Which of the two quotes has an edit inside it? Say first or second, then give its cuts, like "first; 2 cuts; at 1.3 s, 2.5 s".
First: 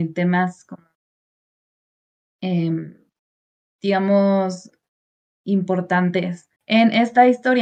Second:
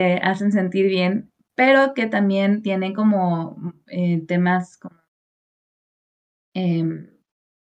first; 1 cut; at 6.6 s